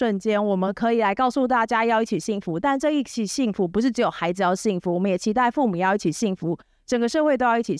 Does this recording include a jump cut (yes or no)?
no